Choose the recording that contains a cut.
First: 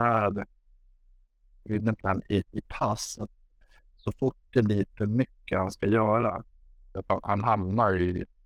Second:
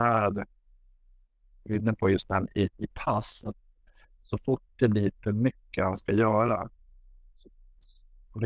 first; 2 cuts; at 2.0 s, 7.0 s

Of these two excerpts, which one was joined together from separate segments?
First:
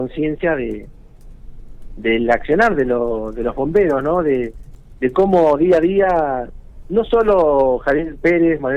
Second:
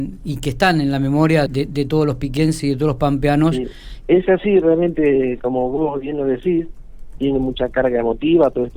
second; 3 cuts; at 1.5 s, 4.0 s, 7.2 s

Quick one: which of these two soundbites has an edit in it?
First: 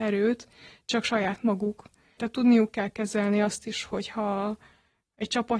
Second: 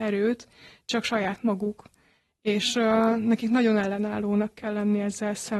first; 1 cut; at 2.2 s

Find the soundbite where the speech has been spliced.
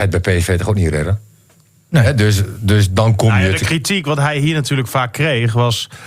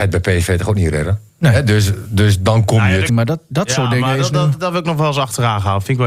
second; 2 cuts; at 1.3 s, 3.1 s

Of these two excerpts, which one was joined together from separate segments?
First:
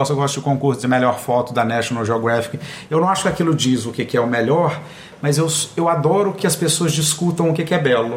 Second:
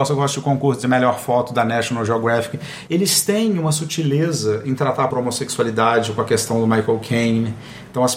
second; 2 cuts; at 2.9 s, 5.1 s

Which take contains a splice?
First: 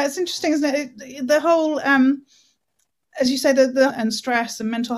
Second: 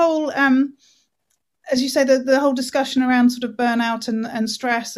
first; 1 cut; at 3.9 s

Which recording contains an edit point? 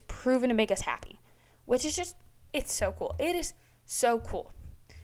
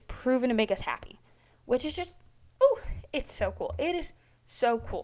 first; 1 cut; at 2.5 s

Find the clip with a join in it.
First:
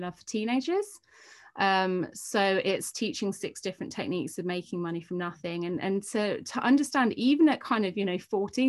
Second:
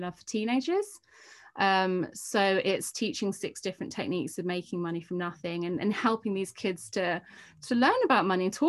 first; 1 cut; at 5.8 s

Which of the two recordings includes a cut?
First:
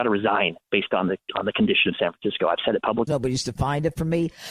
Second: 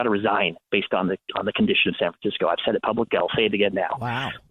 first; 1 cut; at 3.1 s

